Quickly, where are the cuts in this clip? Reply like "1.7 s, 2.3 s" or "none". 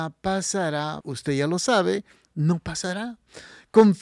1.0 s